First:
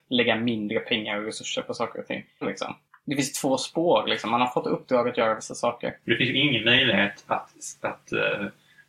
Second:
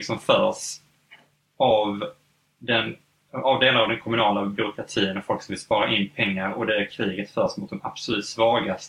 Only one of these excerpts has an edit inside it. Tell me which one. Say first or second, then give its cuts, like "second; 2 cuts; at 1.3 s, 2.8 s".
first; 2 cuts; at 2.4 s, 6.0 s